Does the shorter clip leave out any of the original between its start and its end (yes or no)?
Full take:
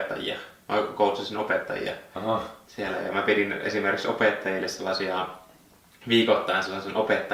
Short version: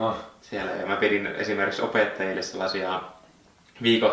no